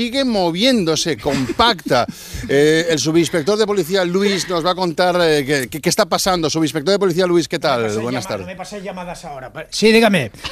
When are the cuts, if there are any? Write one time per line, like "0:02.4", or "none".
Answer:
none